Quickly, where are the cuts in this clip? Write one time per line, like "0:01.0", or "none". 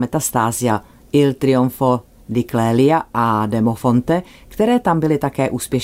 none